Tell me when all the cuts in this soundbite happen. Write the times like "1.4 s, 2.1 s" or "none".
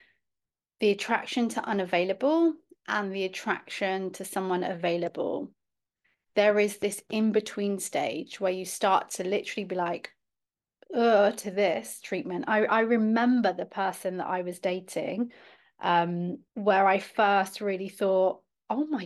16.5 s